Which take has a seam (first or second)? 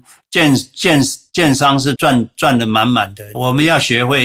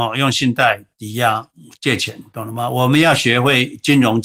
first